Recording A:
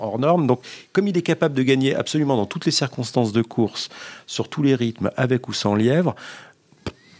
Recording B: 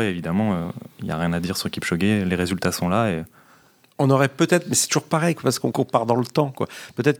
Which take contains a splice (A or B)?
B